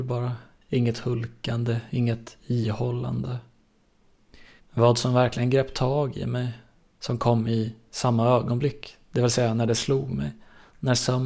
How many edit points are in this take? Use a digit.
1